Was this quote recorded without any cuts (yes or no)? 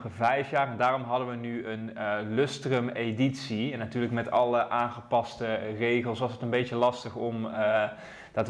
yes